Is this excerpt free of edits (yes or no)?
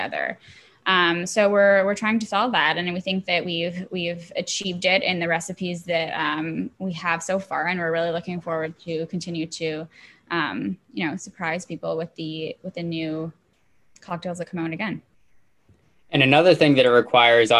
yes